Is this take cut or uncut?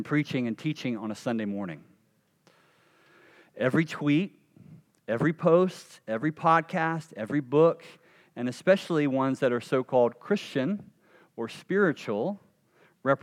uncut